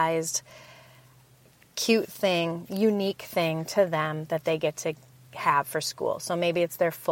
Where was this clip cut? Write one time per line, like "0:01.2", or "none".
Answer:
none